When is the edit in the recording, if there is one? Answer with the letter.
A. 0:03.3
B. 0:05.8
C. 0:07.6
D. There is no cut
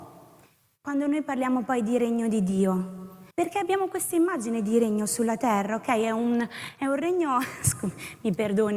A